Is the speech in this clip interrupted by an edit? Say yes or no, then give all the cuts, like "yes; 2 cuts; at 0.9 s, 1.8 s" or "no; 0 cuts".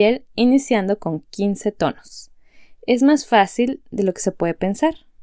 no; 0 cuts